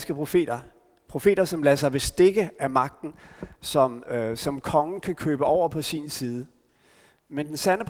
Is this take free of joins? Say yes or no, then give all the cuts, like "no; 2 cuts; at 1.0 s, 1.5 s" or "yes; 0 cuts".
yes; 0 cuts